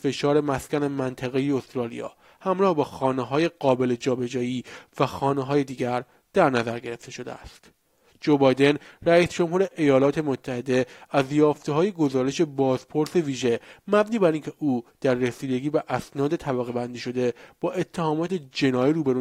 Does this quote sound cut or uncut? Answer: uncut